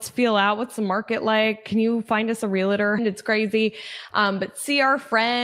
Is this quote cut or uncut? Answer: cut